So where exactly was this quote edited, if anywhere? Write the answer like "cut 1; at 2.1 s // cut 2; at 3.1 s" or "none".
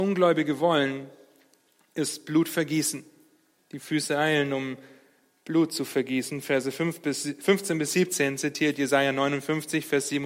cut 1; at 3.6 s